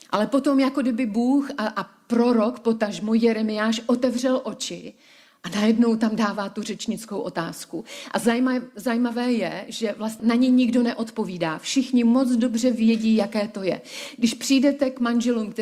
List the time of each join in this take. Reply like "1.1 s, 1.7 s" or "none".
10.2 s